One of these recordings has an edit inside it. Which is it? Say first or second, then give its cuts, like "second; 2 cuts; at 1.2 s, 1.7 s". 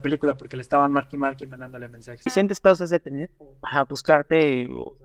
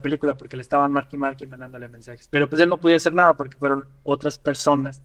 first; 1 cut; at 2.3 s